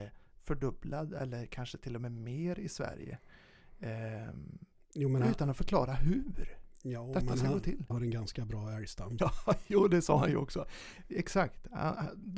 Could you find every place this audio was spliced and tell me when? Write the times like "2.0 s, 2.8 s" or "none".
7.9 s, 9.2 s, 11.1 s

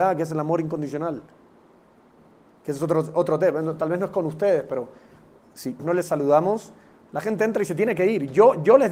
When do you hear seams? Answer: 5.8 s

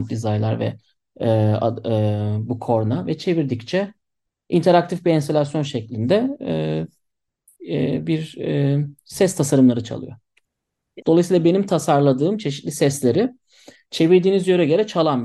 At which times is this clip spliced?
11.0 s

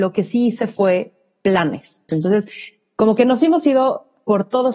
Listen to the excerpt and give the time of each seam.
2.1 s

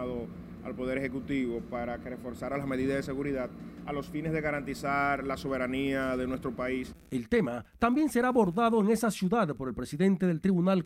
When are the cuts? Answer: none

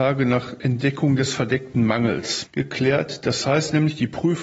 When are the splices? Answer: 2.5 s

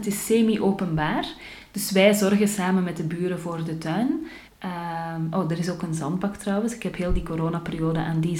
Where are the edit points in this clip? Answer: 4.5 s

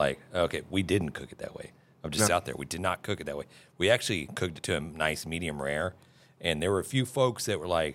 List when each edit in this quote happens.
2.3 s

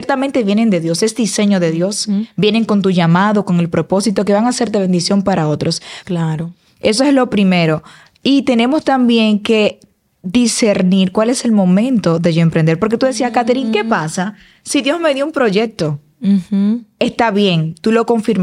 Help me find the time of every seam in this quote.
6.0 s

